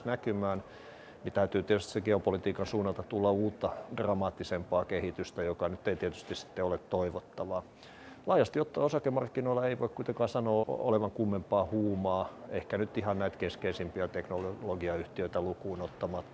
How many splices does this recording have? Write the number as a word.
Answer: one